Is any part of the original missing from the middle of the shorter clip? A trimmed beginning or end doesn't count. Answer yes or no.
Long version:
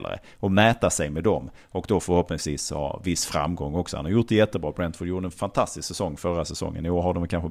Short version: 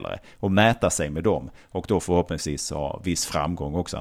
no